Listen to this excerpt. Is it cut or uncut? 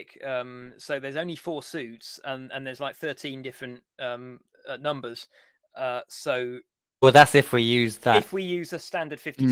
uncut